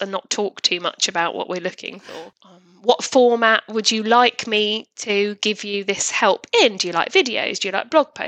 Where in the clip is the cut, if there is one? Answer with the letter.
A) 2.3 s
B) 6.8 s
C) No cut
A